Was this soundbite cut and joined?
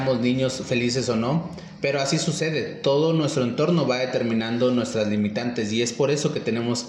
no; 0 cuts

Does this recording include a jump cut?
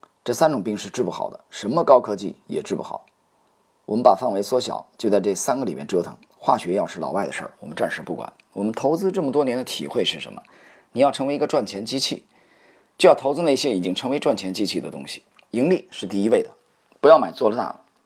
no; 0 cuts

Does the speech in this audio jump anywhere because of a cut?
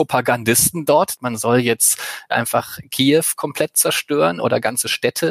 yes; 1 cut; at 1.2 s

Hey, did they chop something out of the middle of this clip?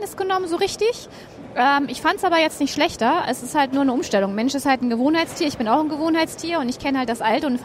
no; 0 cuts

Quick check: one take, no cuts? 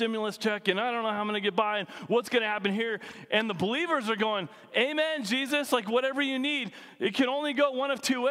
yes; 0 cuts

